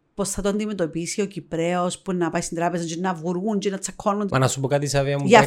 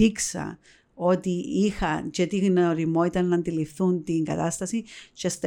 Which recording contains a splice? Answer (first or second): first